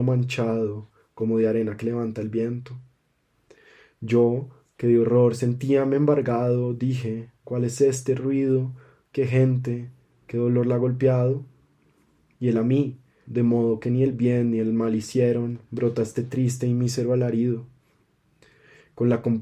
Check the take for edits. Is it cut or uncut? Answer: cut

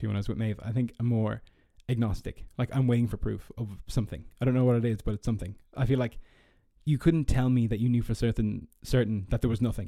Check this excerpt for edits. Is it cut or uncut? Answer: uncut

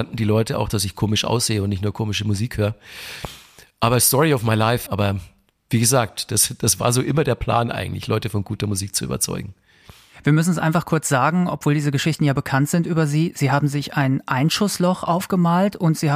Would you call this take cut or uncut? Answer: cut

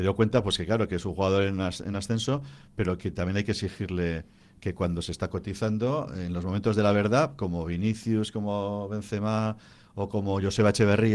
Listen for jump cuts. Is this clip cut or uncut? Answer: uncut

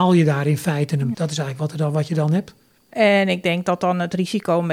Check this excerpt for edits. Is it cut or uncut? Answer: cut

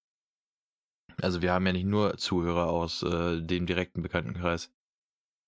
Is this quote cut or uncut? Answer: uncut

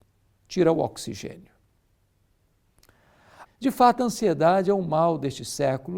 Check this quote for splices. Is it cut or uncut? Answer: cut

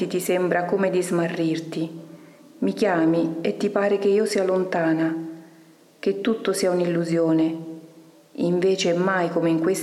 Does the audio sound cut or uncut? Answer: uncut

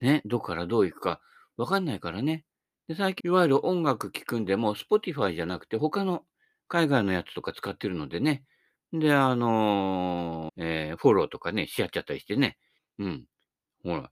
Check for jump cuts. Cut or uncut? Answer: cut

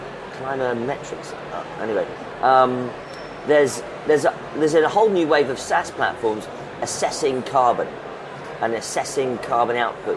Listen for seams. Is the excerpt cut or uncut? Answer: uncut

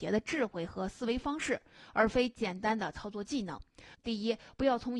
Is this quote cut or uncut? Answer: cut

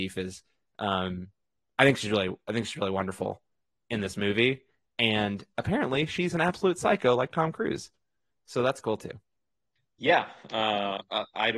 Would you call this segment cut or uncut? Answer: uncut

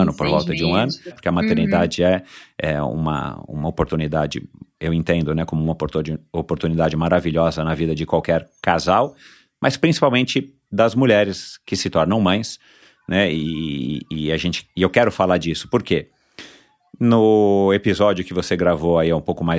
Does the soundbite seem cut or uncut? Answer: cut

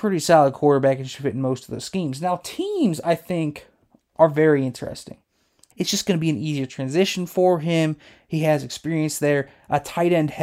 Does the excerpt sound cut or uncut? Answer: cut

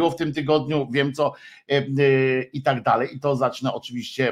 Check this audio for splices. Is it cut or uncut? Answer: uncut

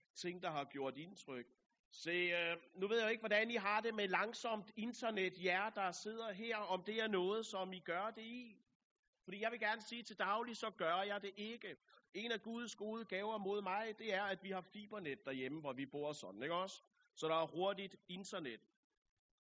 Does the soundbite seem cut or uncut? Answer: cut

